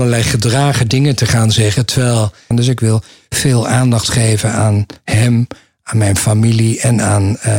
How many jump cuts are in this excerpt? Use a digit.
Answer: 1